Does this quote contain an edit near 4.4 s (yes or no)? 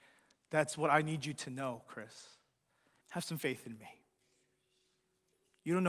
no